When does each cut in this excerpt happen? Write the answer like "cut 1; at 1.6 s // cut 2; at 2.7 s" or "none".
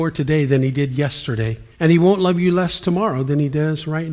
cut 1; at 1.7 s